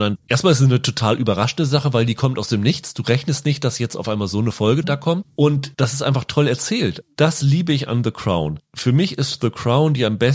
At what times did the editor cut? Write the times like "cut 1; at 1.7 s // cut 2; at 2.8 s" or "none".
none